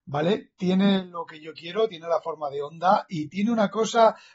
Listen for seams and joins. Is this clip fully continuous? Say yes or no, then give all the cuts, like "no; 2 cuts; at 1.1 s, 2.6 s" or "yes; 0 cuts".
yes; 0 cuts